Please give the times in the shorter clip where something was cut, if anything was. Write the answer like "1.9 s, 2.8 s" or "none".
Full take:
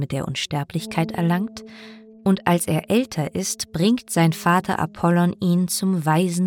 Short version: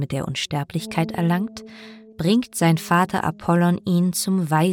2.1 s